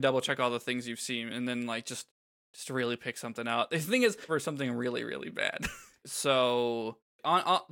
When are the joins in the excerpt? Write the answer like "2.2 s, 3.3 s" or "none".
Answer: 4.3 s, 6.0 s